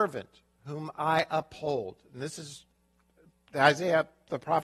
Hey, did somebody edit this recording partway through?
no; 0 cuts

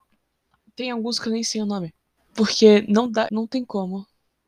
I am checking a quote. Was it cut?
yes; 2 cuts; at 2.2 s, 3.3 s

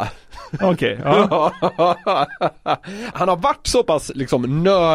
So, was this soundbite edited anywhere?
yes; 1 cut; at 3.1 s

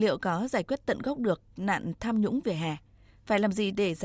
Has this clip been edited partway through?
no; 0 cuts

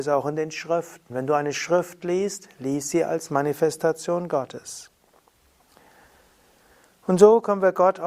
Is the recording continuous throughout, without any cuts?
yes; 0 cuts

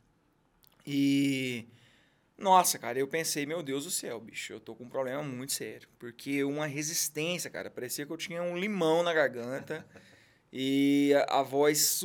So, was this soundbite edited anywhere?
no; 0 cuts

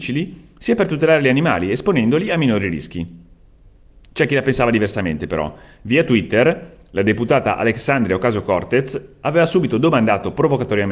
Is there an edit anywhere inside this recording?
no; 0 cuts

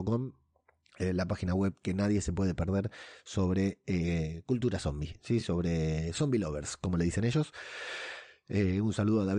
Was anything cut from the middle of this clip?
no; 0 cuts

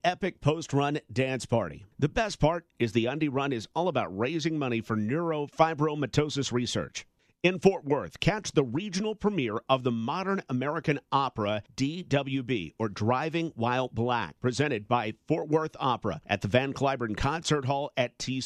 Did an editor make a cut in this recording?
no; 0 cuts

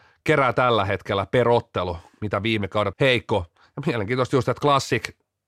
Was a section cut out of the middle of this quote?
yes; 1 cut; at 2.9 s

